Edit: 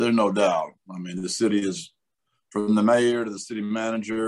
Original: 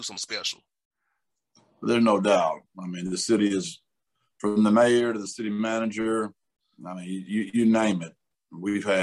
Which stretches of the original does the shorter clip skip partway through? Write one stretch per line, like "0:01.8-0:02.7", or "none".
none